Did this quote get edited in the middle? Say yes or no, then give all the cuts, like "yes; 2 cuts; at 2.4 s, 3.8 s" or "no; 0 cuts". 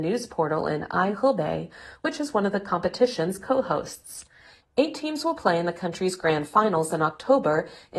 no; 0 cuts